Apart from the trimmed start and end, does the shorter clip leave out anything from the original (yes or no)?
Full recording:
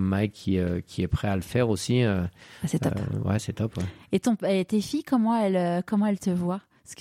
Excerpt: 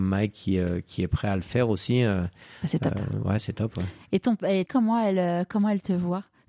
yes